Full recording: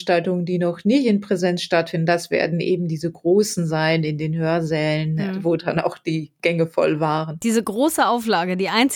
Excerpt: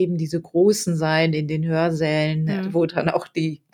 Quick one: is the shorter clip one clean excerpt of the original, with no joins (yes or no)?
yes